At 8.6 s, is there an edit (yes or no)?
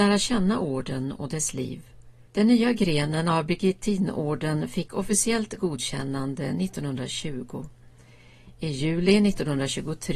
no